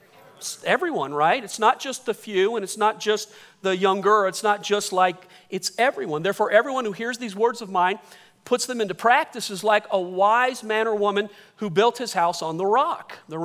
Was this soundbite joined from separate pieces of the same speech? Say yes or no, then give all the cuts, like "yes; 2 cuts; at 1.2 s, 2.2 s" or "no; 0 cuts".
no; 0 cuts